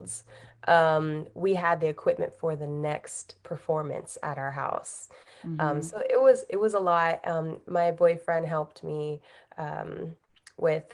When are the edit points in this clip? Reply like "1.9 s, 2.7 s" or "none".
none